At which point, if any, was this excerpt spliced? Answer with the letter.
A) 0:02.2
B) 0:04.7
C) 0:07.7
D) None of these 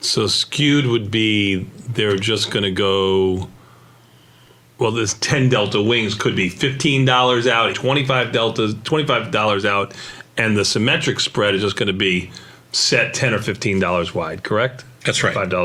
C